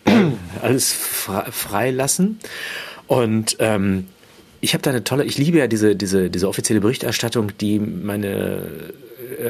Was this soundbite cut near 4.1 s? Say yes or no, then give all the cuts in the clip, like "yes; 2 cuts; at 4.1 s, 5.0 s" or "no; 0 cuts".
no; 0 cuts